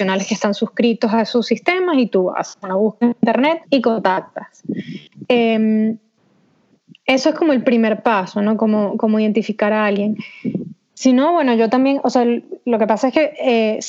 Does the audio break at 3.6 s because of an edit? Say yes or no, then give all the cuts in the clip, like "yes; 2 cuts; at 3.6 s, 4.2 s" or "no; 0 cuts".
yes; 1 cut; at 3.6 s